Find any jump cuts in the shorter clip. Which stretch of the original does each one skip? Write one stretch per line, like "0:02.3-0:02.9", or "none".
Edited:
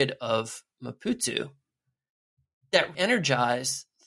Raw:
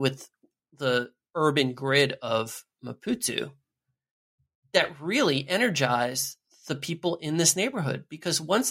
0:05.0-0:05.5

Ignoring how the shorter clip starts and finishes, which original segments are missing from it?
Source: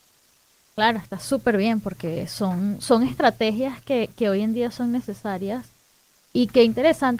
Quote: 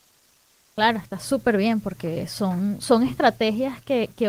none

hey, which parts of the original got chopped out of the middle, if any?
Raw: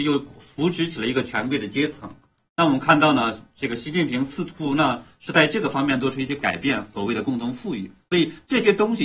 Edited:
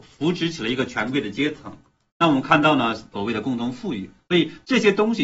0:03.5-0:06.9

